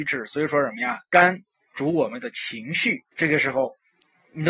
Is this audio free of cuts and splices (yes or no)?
no